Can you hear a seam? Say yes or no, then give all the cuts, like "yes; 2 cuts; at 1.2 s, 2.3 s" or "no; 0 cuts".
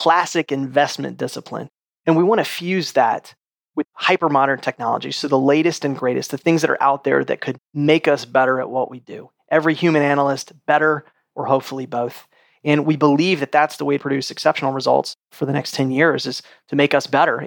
yes; 2 cuts; at 11.3 s, 14.0 s